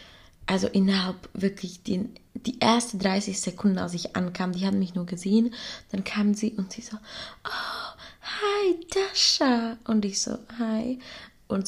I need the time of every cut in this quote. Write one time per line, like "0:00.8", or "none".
none